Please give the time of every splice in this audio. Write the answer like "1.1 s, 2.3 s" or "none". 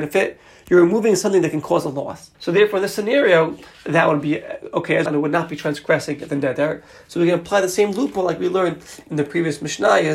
2.3 s, 5.1 s